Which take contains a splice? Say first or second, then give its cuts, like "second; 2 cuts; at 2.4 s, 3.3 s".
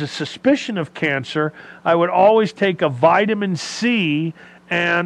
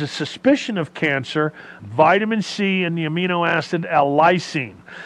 second; 1 cut; at 1.8 s